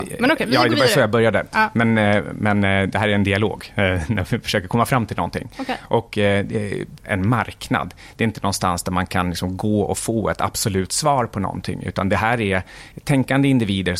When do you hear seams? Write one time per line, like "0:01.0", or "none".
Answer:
0:07.0